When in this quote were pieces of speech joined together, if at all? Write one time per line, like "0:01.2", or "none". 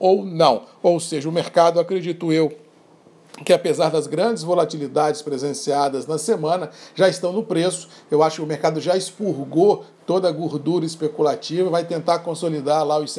none